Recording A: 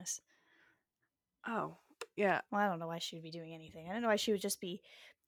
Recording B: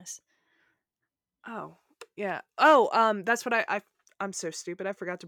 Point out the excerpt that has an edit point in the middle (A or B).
A